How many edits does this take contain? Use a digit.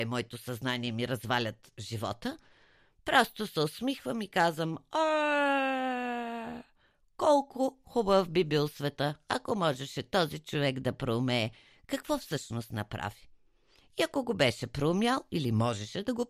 0